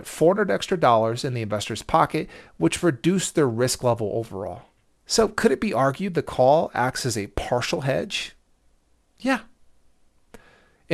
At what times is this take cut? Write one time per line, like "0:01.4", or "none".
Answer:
none